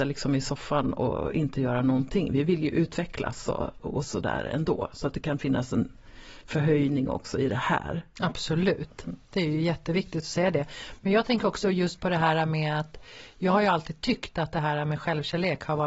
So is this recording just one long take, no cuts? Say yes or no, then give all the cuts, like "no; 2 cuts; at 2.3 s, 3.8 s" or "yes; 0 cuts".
no; 1 cut; at 3.8 s